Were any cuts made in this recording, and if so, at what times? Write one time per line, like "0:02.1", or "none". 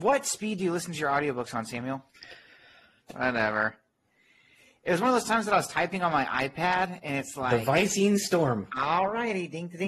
0:03.0